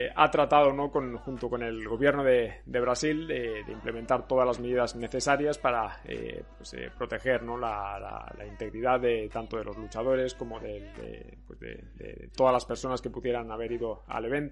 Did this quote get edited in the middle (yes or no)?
no